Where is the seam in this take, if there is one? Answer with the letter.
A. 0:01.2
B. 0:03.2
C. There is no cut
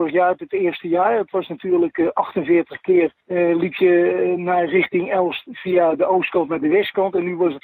B